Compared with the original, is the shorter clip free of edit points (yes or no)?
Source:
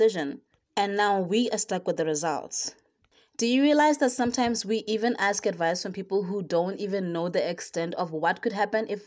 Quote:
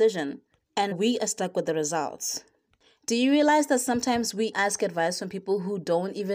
no